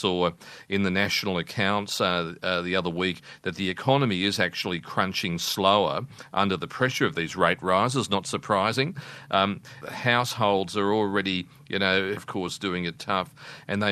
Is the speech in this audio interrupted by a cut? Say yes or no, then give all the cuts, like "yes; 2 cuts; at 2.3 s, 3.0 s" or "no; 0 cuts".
yes; 2 cuts; at 9.8 s, 12.2 s